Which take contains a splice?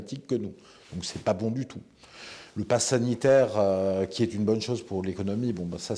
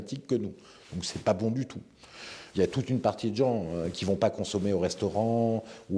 second; 1 cut; at 2.5 s

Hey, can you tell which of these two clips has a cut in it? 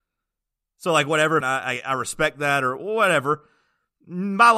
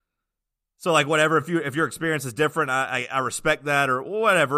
first; 1 cut; at 1.4 s

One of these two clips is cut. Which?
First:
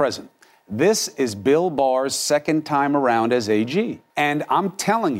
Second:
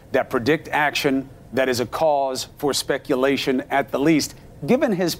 first; 1 cut; at 4.1 s

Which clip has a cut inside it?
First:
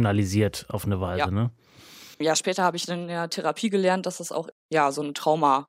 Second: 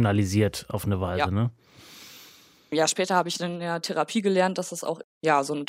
first; 1 cut; at 2.1 s

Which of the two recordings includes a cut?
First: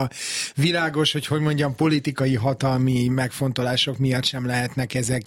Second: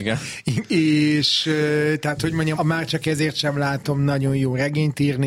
second; 1 cut; at 2.5 s

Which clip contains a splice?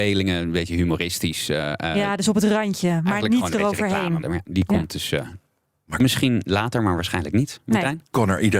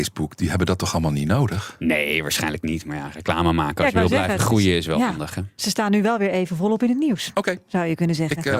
first; 1 cut; at 4.2 s

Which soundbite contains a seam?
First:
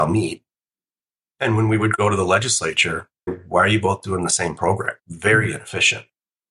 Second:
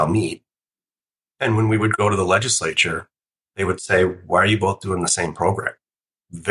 first; 2 cuts; at 3.3 s, 5.0 s

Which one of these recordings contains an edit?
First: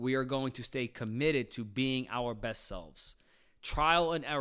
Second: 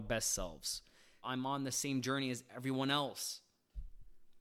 second; 1 cut; at 1.2 s

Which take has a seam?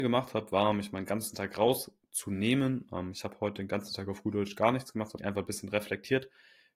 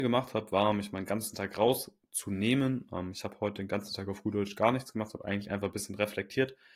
first; 1 cut; at 5.2 s

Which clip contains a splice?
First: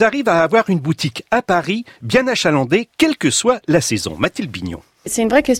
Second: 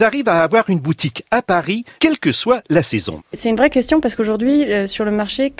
second; 2 cuts; at 2.0 s, 3.2 s

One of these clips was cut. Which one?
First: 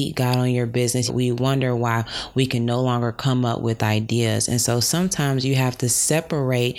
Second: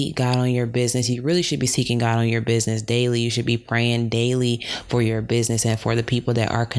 first; 2 cuts; at 1.1 s, 4.5 s

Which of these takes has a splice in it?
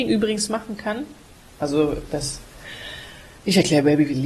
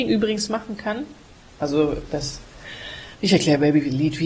second; 1 cut; at 3.1 s

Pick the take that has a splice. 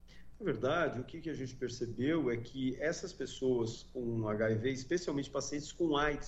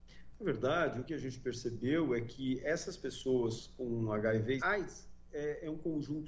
second; 2 cuts; at 1.1 s, 4.6 s

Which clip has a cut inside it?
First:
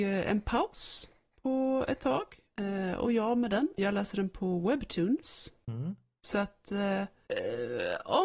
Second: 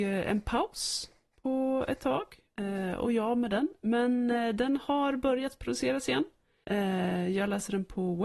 first; 1 cut; at 3.8 s

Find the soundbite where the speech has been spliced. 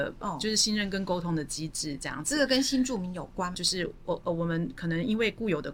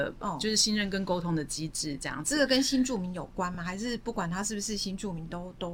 first; 1 cut; at 3.5 s

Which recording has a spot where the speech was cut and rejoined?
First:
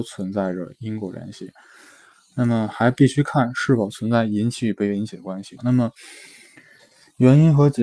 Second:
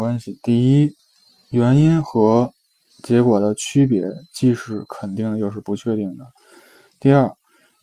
first; 1 cut; at 5.6 s

